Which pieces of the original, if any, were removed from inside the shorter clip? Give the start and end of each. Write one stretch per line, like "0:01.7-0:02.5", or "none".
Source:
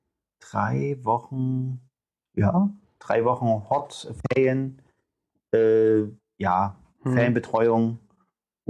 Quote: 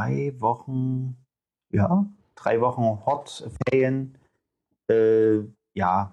none